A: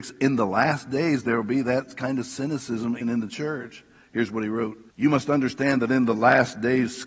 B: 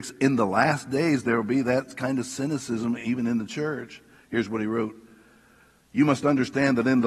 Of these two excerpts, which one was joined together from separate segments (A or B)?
A